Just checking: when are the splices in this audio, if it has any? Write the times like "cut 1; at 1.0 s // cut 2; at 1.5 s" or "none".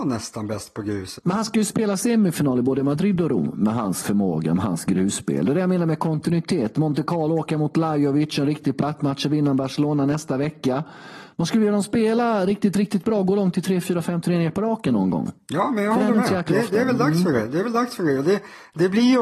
cut 1; at 1.2 s